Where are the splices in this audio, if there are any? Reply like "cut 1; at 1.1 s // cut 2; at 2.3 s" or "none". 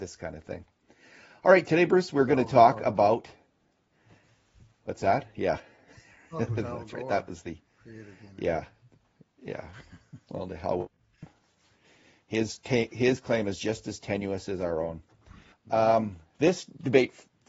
cut 1; at 15.5 s